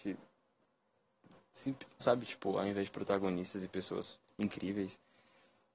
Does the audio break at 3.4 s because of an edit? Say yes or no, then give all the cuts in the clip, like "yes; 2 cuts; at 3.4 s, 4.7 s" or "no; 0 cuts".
no; 1 cut; at 2.0 s